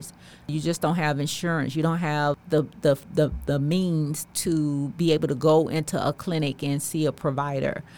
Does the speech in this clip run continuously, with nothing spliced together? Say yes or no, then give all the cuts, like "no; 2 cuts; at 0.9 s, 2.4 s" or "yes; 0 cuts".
yes; 0 cuts